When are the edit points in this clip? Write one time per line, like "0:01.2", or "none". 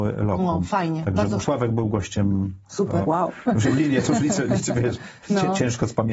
0:01.4
0:03.0